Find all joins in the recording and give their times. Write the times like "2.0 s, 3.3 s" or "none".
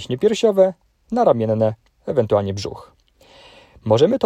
1.9 s